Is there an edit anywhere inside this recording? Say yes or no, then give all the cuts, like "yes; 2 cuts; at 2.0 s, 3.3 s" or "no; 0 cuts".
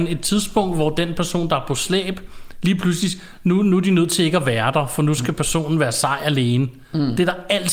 no; 0 cuts